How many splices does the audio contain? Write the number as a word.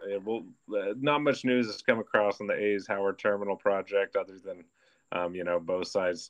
zero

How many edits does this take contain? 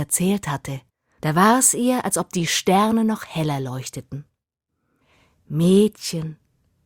zero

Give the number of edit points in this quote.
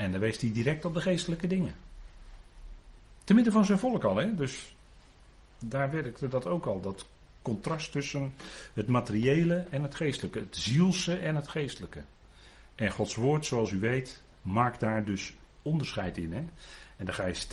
one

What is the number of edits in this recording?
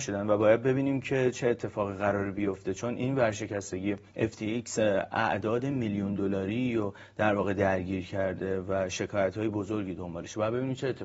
one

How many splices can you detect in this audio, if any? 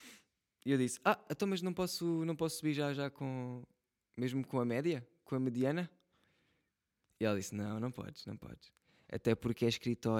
zero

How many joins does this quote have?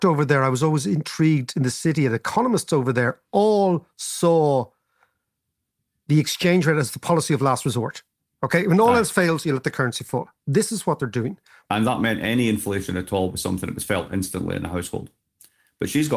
one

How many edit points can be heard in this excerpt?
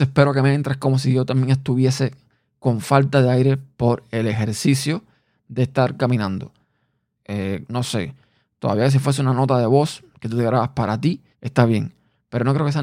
two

